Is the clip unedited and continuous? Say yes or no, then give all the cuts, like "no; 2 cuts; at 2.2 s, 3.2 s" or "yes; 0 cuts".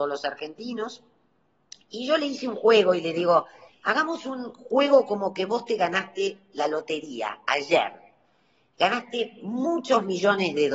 no; 1 cut; at 3.7 s